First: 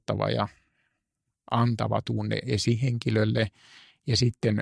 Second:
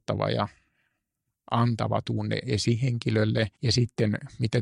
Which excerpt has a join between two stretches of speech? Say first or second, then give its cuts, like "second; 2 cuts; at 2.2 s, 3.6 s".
second; 1 cut; at 3.5 s